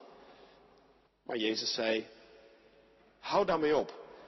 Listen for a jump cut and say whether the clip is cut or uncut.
cut